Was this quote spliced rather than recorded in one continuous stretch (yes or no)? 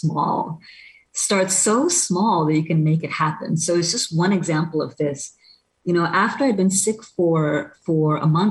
no